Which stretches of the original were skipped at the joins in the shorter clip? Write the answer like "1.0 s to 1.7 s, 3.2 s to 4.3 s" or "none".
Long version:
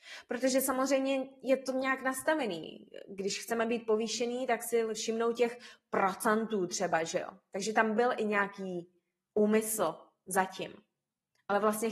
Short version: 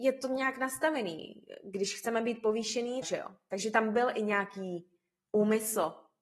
4.5 s to 7.0 s